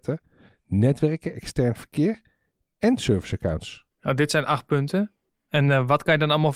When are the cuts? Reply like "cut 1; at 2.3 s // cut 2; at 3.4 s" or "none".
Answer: cut 1; at 3.9 s // cut 2; at 5.5 s